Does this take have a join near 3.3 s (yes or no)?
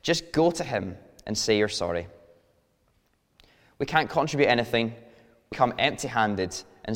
no